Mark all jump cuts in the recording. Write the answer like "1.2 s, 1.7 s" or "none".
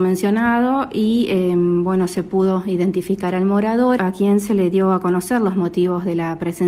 4.0 s

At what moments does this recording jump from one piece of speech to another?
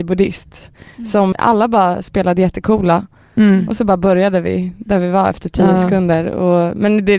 1.3 s

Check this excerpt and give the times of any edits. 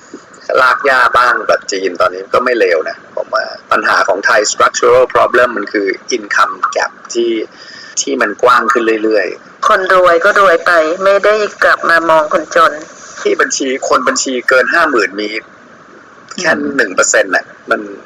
3.6 s, 7.9 s

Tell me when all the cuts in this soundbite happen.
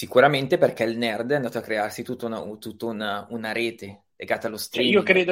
4.1 s

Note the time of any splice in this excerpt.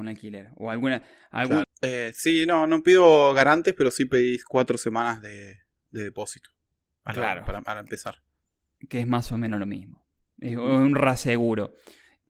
1.6 s

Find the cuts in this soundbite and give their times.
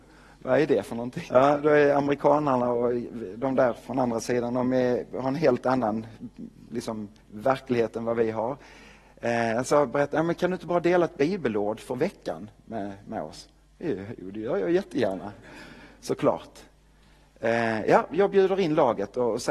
1.3 s

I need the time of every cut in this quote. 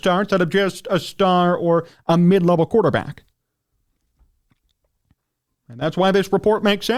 5.5 s

